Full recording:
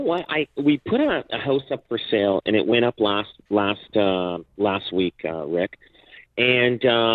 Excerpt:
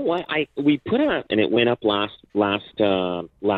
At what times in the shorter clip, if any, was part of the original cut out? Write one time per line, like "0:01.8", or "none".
0:01.3